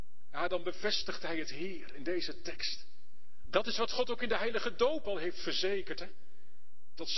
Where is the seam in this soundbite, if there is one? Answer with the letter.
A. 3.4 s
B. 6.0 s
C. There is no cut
A